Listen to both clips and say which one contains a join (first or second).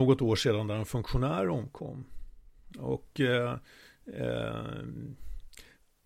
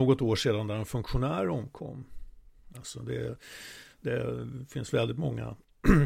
second